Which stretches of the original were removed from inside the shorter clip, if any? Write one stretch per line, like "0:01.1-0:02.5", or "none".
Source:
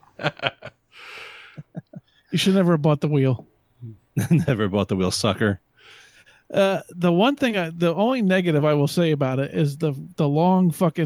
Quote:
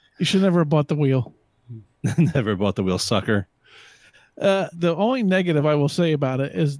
0:06.8-0:07.7